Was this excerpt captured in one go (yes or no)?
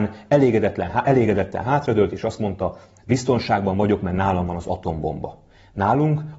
yes